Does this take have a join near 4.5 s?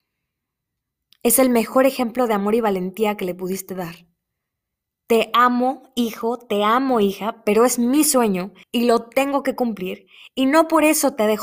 no; 1 cut; at 8.6 s

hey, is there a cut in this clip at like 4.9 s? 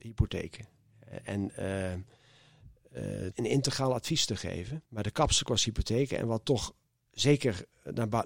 yes; 2 cuts; at 3.3 s, 4.9 s

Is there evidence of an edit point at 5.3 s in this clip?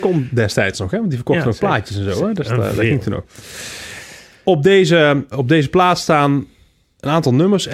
yes; 1 cut; at 5.3 s

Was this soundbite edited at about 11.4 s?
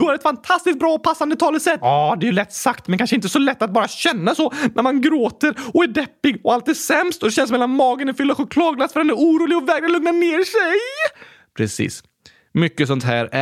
no; 1 cut; at 1.8 s

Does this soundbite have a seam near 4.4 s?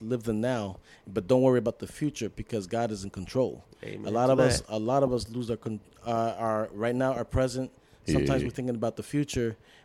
no; 0 cuts

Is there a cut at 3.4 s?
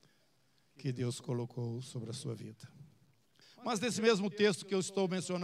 yes; 1 cut; at 3.4 s

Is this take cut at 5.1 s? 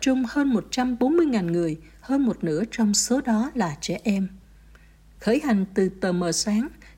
yes; 1 cut; at 5.1 s

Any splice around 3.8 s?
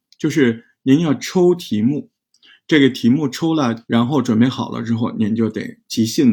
yes; 1 cut; at 3.8 s

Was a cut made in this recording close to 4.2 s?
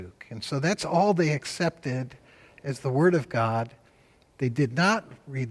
no; 0 cuts

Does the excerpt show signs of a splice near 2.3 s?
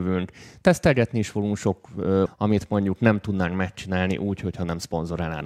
yes; 1 cut; at 2.3 s

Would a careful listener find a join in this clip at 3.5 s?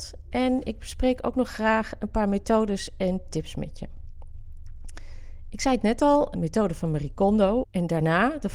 no; 2 cuts; at 6.3 s, 7.6 s

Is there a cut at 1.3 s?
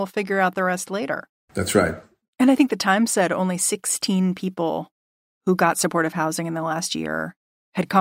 no; 0 cuts

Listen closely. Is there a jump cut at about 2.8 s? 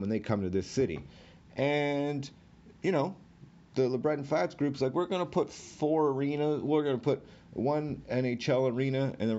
yes; 1 cut; at 2.8 s

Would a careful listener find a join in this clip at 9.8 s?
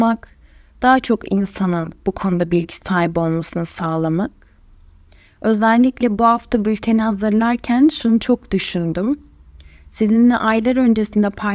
no; 0 cuts

